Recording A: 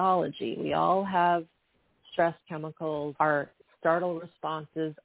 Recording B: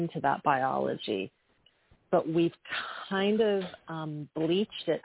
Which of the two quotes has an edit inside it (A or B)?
A